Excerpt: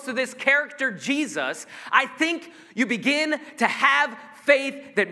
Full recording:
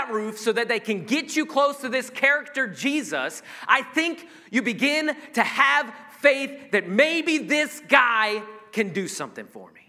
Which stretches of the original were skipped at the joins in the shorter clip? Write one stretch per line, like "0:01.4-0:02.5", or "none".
none